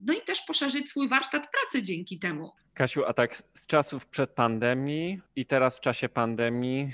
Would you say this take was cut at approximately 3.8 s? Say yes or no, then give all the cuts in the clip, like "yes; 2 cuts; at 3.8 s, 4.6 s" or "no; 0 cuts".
no; 2 cuts; at 2.6 s, 5.3 s